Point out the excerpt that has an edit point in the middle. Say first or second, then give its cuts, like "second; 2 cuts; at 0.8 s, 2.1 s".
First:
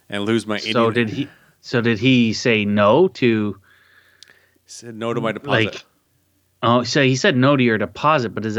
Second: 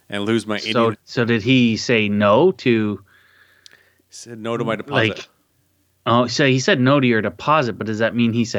second; 1 cut; at 0.9 s